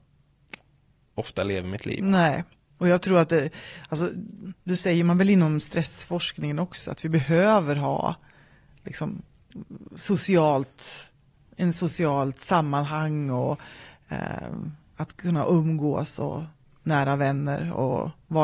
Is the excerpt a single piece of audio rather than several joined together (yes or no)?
yes